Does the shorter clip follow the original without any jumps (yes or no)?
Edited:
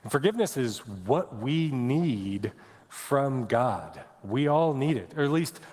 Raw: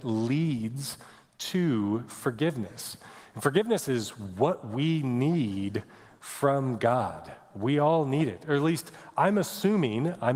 yes